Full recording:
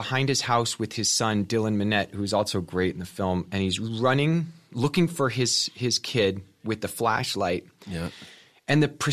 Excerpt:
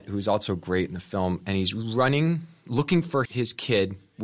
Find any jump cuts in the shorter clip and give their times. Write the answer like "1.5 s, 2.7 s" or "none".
3.3 s

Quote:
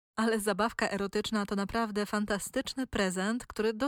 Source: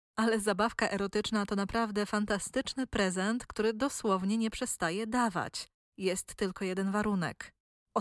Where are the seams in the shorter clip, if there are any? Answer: none

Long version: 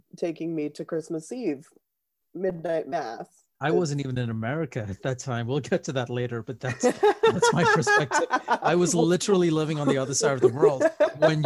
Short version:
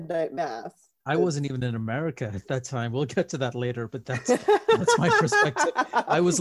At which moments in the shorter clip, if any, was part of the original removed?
none

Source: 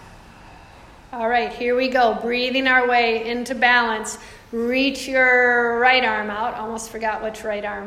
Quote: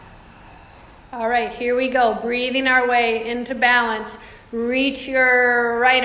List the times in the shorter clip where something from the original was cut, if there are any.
none

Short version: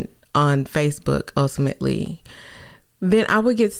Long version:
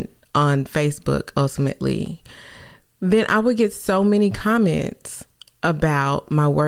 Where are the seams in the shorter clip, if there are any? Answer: none

